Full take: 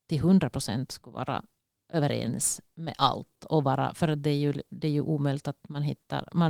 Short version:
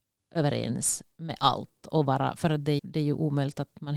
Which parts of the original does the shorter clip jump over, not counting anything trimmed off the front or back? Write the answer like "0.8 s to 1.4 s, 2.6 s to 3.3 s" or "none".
4.4 s to 4.7 s